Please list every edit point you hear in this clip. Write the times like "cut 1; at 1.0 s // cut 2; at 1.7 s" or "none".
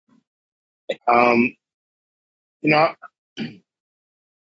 cut 1; at 1.0 s // cut 2; at 3.3 s